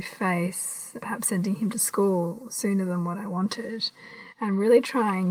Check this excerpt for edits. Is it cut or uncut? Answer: cut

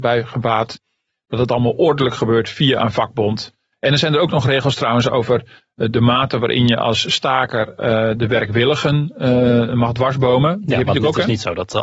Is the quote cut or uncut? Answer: uncut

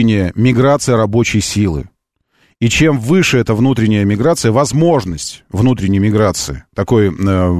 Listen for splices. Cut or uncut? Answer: uncut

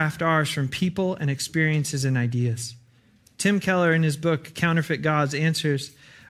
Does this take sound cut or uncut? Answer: cut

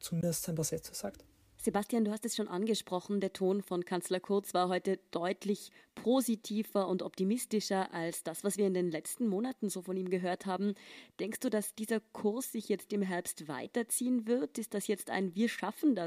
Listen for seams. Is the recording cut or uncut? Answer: cut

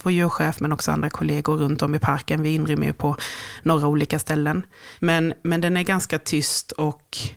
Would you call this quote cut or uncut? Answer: uncut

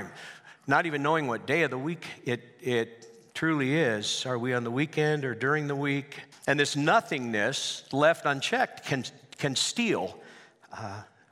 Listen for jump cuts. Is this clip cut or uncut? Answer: cut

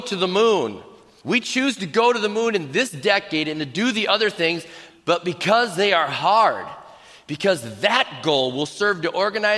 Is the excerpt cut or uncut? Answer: cut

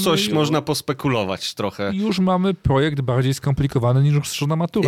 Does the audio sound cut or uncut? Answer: uncut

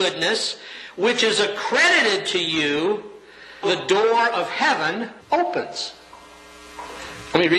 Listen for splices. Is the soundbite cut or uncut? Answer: cut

